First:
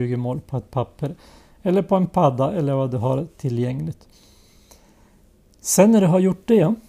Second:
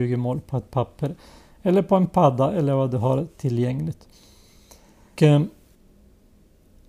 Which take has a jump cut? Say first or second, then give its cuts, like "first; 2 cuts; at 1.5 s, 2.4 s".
second; 1 cut; at 5.2 s